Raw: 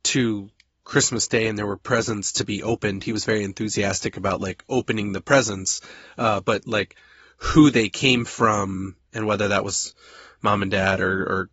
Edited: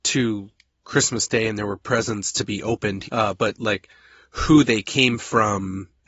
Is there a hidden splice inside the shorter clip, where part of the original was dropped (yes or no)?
yes